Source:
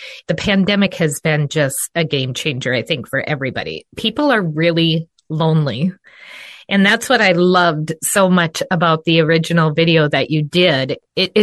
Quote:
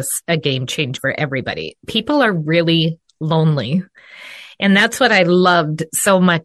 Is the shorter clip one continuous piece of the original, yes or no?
no